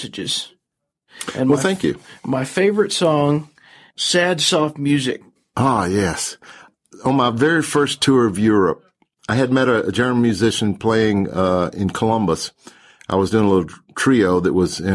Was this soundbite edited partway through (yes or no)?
no